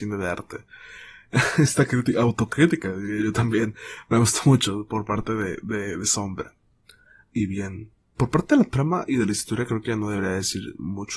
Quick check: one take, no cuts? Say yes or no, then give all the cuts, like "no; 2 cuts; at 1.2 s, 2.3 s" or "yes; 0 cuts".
yes; 0 cuts